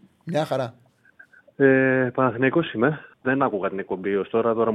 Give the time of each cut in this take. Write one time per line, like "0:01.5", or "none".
0:03.1